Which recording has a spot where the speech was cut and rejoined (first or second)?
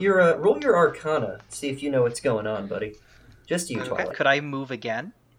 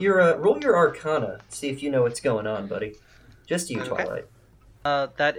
first